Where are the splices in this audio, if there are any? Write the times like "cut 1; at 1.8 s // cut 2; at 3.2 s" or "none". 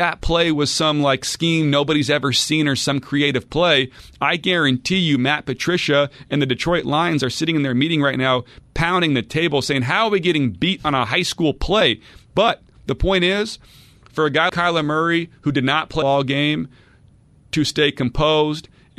cut 1; at 12.3 s // cut 2; at 14.5 s // cut 3; at 16.0 s

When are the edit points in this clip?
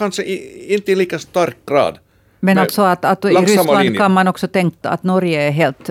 cut 1; at 4.8 s

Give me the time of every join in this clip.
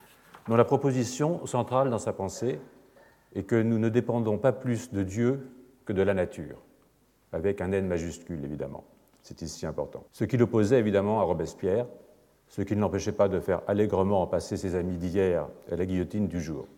cut 1; at 10.1 s // cut 2; at 12.3 s

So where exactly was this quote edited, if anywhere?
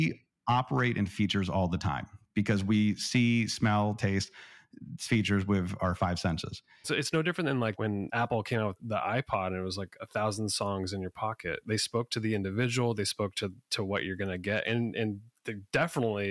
cut 1; at 6.8 s

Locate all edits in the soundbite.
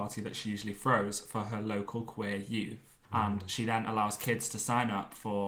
cut 1; at 3.1 s

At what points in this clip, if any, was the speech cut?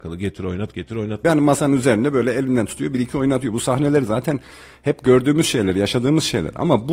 cut 1; at 1.2 s

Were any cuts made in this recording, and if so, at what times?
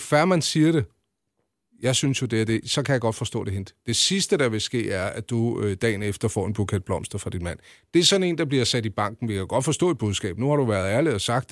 none

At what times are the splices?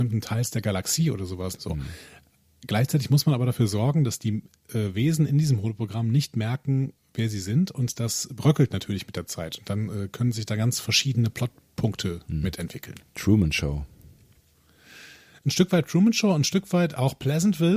cut 1; at 1.6 s

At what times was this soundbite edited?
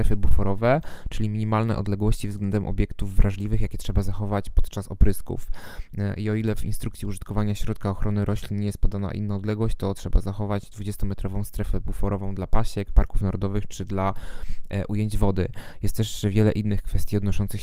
none

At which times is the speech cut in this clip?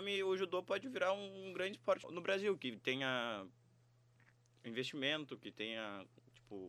cut 1; at 2.0 s

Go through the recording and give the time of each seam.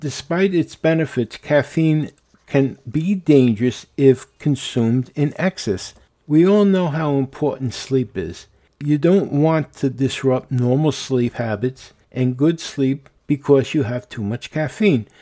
cut 1; at 6.1 s

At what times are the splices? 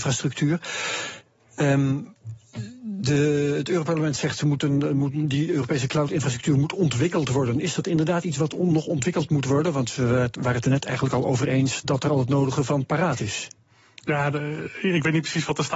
none

